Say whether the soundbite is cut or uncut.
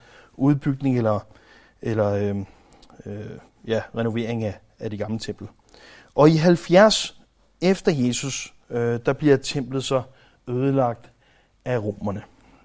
uncut